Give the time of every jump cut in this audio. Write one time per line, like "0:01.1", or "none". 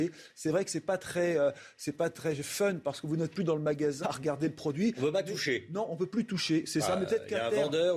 0:04.0